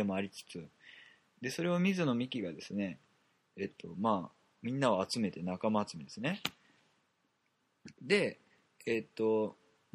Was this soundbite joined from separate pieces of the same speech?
yes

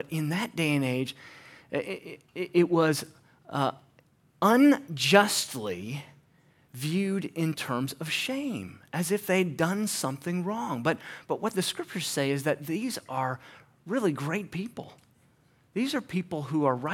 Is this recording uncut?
yes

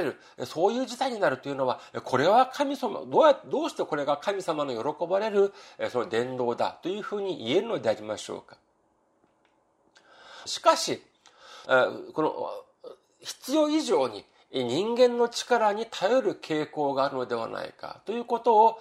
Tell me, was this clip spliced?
yes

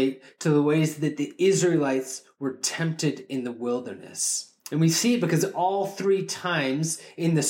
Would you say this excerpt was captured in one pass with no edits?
no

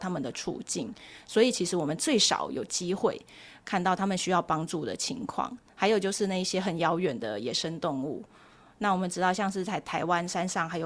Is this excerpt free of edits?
yes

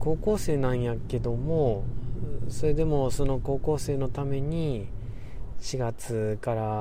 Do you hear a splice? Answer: yes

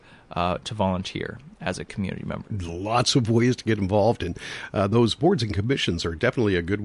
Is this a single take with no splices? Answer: no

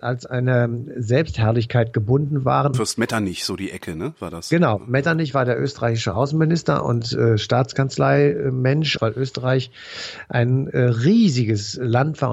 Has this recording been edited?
yes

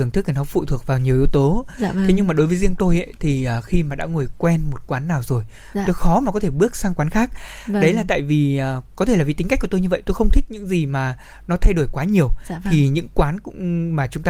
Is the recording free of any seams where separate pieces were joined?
yes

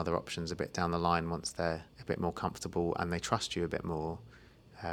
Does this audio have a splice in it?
yes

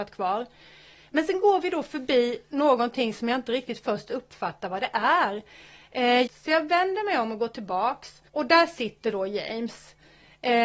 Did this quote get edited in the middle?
yes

